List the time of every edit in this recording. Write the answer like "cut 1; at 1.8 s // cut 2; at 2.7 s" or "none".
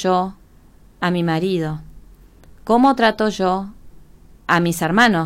none